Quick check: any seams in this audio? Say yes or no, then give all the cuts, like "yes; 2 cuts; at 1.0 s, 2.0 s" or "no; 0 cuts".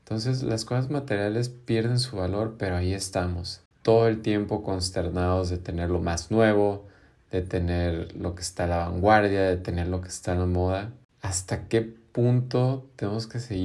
no; 0 cuts